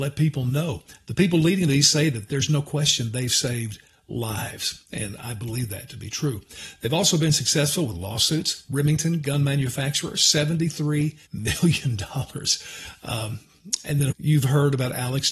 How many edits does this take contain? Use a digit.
2